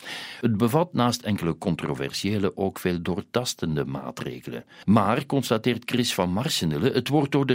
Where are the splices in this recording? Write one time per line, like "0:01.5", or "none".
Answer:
none